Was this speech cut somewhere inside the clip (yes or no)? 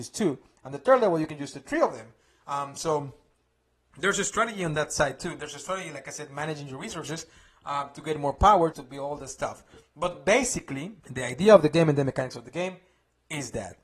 yes